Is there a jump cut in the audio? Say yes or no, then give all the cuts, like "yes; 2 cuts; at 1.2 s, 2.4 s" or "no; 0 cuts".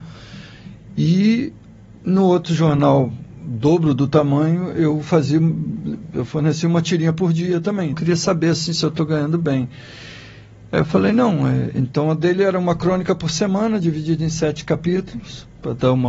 yes; 1 cut; at 7.9 s